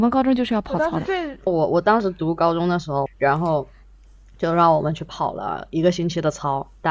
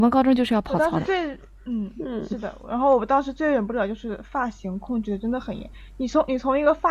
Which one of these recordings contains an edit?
first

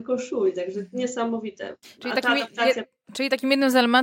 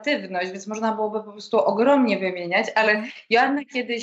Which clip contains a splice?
first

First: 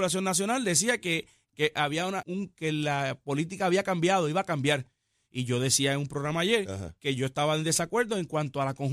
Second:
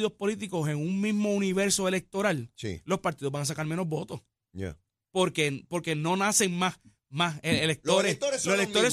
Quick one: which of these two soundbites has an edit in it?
first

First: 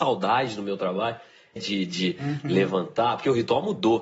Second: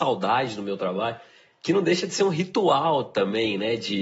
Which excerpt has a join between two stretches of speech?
first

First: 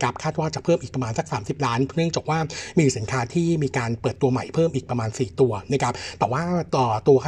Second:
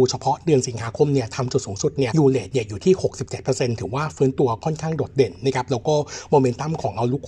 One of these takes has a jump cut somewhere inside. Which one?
second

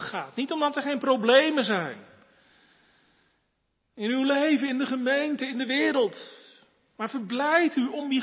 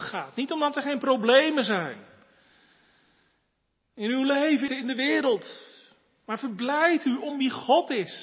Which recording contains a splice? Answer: second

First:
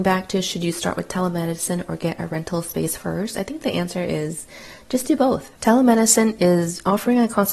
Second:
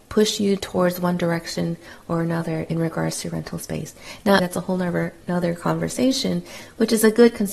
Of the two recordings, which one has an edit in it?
second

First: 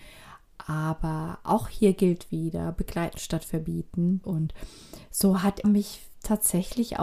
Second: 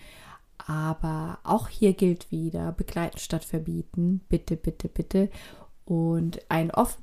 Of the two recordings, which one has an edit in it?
first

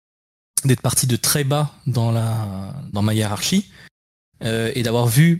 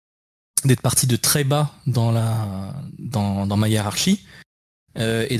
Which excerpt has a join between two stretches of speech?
first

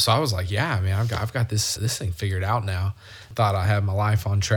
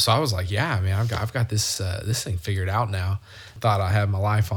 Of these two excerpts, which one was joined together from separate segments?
first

